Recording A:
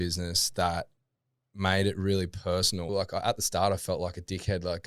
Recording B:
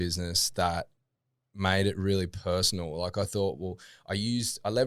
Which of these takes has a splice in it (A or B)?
A